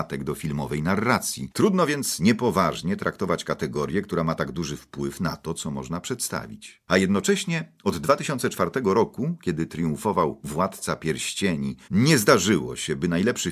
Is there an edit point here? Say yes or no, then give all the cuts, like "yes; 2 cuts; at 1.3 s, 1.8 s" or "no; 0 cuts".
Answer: yes; 2 cuts; at 1.5 s, 11.9 s